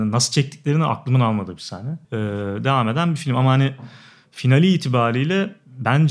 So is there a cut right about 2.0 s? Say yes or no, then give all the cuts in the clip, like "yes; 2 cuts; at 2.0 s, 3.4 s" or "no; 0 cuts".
yes; 1 cut; at 2.0 s